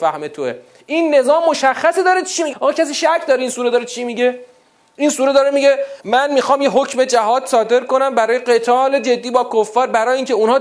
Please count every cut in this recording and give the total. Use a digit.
2